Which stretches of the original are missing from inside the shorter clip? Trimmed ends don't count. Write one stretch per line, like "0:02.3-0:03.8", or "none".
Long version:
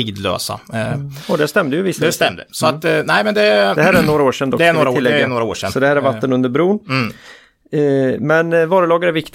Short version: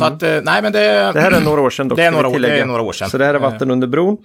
none